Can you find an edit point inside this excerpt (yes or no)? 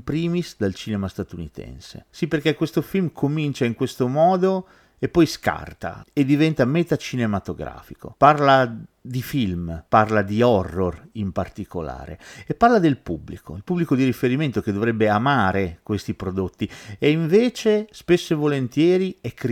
yes